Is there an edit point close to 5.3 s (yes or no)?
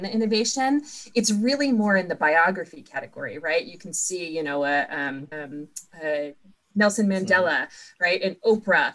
yes